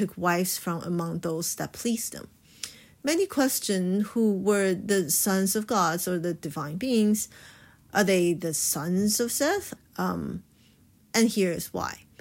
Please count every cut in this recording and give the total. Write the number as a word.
one